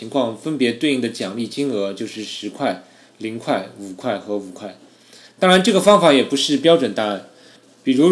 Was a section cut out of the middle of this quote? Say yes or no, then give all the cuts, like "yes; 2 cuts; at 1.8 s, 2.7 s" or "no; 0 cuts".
yes; 1 cut; at 5.3 s